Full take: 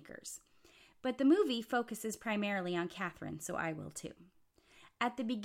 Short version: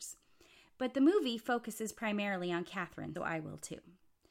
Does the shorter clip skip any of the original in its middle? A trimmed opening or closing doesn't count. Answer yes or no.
yes